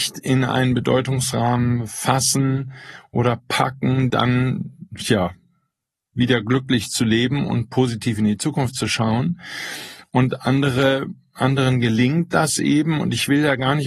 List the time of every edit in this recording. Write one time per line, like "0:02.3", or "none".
0:04.1